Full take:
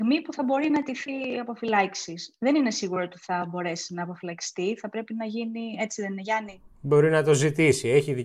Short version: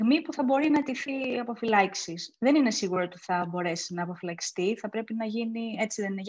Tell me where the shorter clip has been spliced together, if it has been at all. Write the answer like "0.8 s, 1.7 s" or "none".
none